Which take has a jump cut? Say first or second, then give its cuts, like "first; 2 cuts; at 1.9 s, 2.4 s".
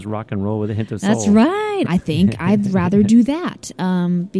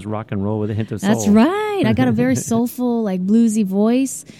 first; 1 cut; at 1.8 s